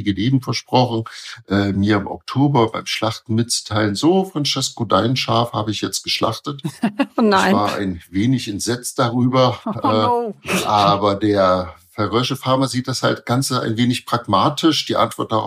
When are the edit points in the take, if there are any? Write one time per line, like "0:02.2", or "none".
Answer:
none

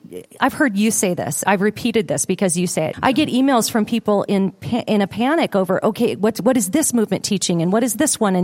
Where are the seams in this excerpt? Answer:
0:01.4
0:02.9

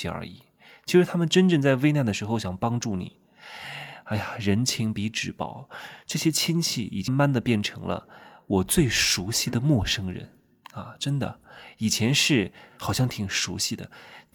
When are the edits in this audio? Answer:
0:07.1

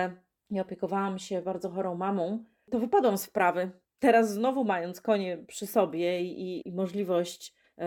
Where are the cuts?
none

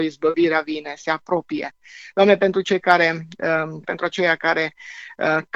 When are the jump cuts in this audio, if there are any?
0:02.1
0:03.8

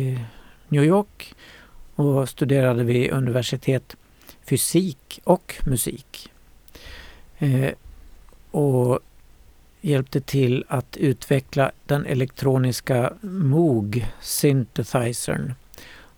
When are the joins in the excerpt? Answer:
none

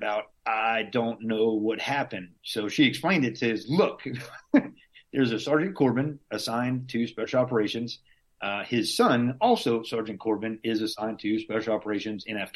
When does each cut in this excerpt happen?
0:03.6

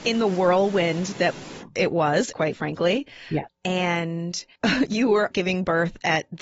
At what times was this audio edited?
0:02.3
0:03.5
0:05.3

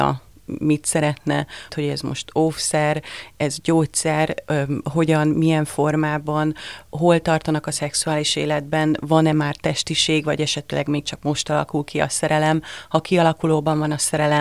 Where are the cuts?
0:01.7

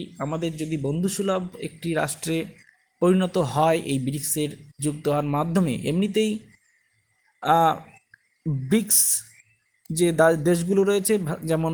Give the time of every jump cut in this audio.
0:04.7

